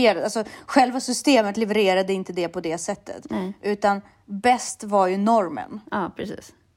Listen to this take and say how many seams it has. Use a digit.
0